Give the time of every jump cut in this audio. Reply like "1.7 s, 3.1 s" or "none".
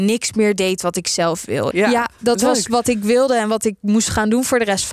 1.7 s

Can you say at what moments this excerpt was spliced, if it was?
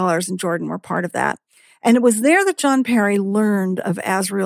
none

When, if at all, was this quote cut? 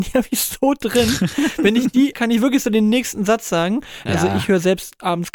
2.1 s, 4.1 s

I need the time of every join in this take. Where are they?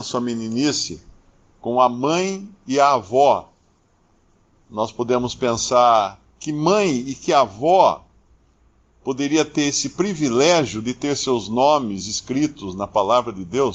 6.3 s

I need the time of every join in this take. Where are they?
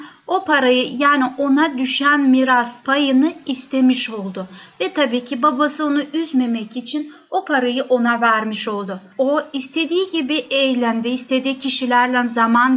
9.1 s

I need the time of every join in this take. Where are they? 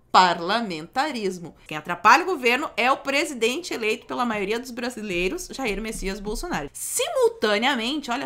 1.7 s, 6.7 s

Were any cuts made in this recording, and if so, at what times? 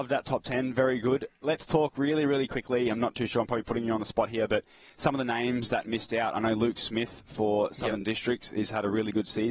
none

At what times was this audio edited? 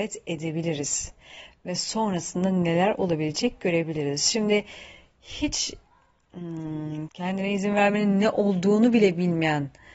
7.1 s

